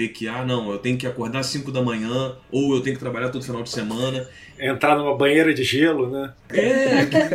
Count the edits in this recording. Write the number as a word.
one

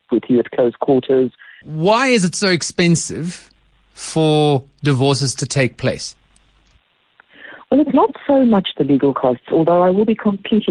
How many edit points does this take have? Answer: one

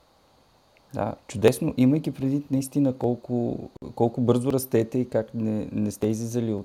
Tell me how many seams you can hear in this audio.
one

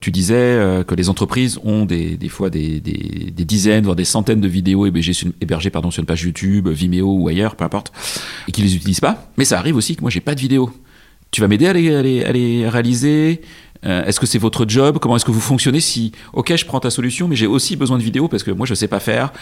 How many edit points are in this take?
zero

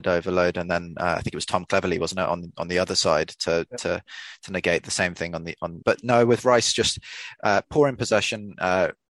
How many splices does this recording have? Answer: one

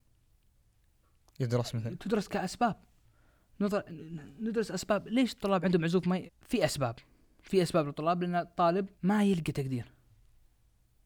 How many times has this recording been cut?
two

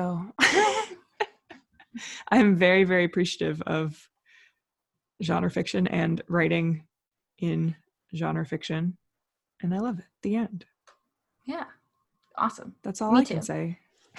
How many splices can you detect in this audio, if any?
zero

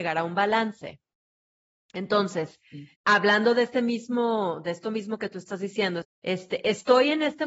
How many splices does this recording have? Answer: two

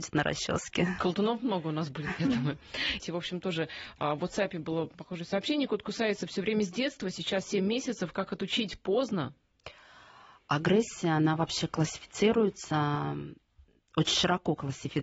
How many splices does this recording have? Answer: one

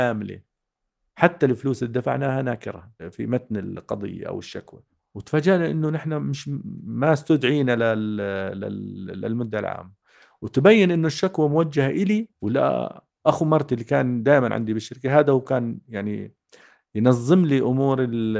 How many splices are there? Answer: one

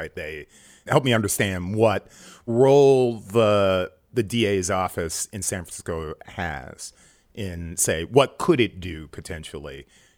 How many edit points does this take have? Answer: zero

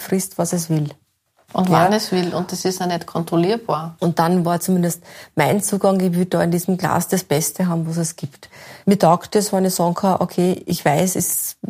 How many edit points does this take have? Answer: one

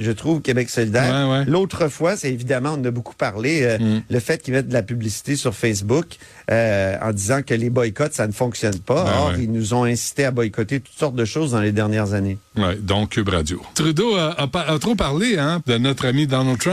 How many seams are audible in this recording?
two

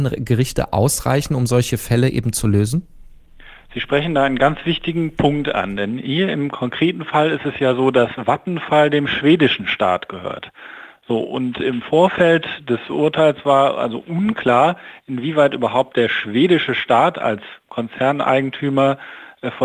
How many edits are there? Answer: one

